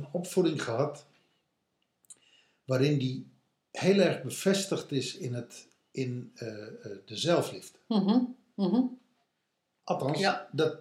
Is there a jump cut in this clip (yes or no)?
no